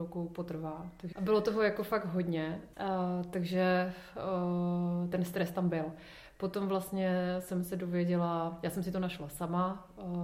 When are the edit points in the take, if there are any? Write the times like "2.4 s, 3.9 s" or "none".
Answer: 1.1 s, 2.7 s